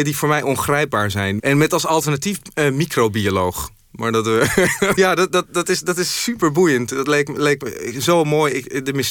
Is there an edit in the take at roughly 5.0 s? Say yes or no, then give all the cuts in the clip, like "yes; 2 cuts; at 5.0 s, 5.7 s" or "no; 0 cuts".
yes; 2 cuts; at 1.4 s, 5.0 s